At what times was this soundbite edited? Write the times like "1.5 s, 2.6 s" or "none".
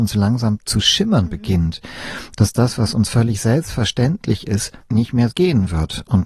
5.3 s